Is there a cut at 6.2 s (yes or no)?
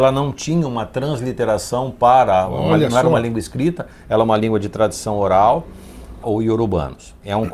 yes